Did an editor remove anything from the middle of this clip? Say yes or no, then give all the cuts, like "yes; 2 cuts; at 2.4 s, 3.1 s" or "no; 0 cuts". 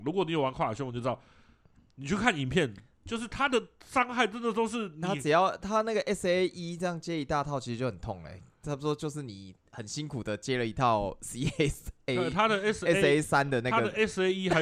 no; 0 cuts